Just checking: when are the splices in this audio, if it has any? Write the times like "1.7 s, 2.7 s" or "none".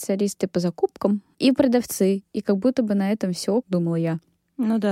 1.3 s, 3.6 s